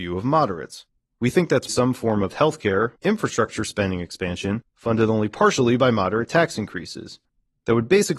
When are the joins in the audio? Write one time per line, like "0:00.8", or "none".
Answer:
0:01.7
0:03.0